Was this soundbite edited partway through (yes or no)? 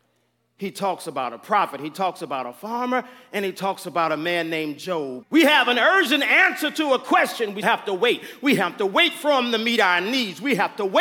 yes